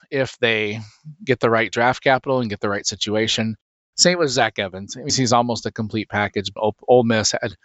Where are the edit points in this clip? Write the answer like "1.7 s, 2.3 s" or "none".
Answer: 3.9 s, 5.1 s, 6.6 s